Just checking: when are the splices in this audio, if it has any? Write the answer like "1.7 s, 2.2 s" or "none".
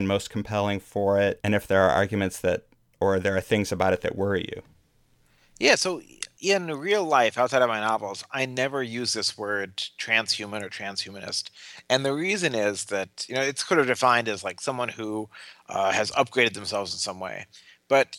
1.4 s